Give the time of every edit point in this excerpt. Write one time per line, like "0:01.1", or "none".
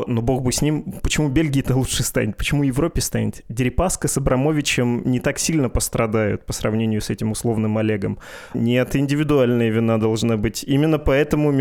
0:08.5